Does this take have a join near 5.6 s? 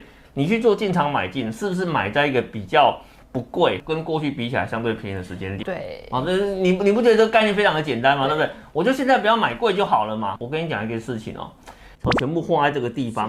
yes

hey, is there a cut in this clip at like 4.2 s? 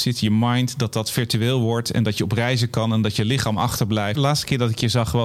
yes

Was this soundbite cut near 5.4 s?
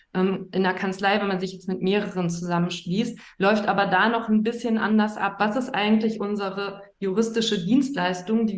yes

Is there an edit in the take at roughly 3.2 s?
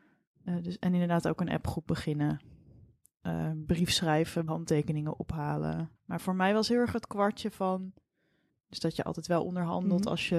no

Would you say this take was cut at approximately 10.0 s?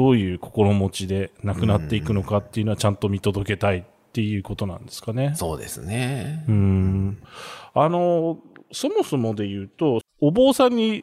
yes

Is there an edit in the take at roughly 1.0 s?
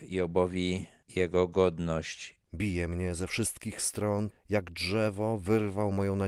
no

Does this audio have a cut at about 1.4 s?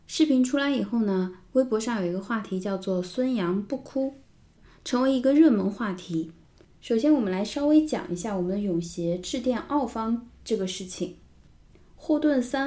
no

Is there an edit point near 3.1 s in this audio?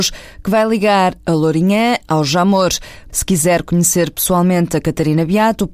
yes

